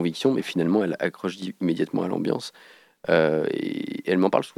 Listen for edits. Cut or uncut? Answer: uncut